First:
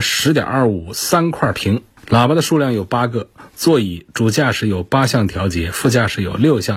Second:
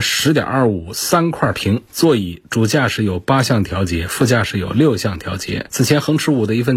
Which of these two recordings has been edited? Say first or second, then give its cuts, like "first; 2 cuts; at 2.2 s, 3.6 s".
second; 2 cuts; at 1.9 s, 5.7 s